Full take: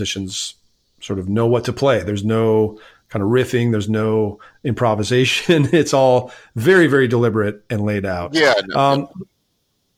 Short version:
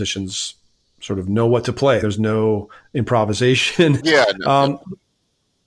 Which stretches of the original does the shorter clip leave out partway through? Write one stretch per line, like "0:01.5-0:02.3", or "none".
0:02.0-0:03.7
0:05.7-0:08.3